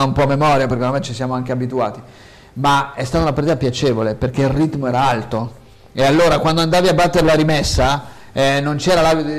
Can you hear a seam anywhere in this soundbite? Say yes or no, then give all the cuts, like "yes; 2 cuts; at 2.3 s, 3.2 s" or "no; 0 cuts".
no; 0 cuts